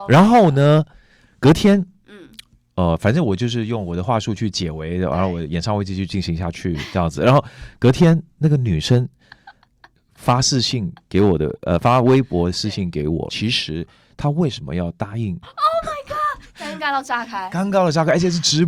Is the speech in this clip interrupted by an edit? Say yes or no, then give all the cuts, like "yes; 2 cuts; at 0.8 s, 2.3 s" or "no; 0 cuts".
yes; 2 cuts; at 13.3 s, 15.4 s